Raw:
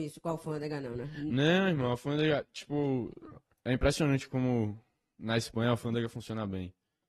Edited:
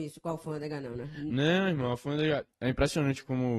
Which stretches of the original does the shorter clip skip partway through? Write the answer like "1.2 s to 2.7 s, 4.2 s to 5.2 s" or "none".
2.5 s to 3.6 s